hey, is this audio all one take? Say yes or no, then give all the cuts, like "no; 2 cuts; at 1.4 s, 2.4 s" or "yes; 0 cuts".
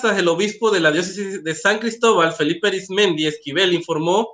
yes; 0 cuts